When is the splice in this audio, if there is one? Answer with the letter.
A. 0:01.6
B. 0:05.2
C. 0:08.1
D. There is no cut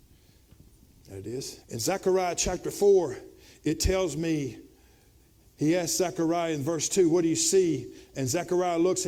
A